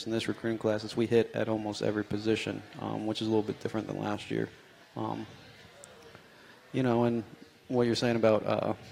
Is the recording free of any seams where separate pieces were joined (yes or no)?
no